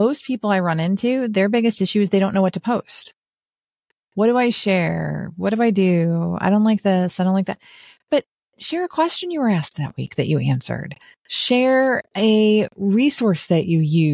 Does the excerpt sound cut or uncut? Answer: uncut